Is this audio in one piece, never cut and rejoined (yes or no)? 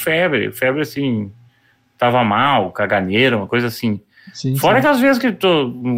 yes